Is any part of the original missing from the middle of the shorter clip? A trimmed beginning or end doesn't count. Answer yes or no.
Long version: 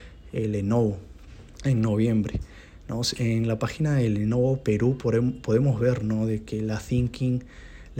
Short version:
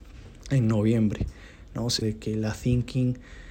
yes